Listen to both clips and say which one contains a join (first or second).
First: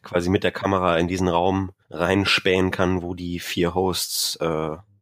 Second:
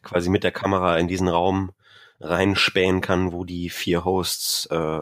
first